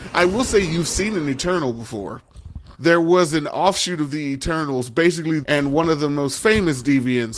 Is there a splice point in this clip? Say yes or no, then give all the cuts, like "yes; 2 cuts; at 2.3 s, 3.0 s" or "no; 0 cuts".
yes; 2 cuts; at 2.7 s, 5.4 s